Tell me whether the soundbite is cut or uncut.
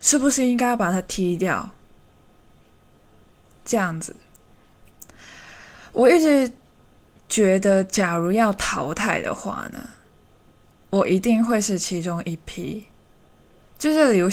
uncut